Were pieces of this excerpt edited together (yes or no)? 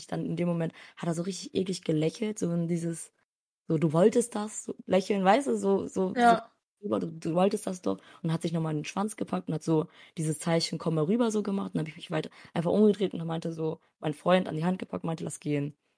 no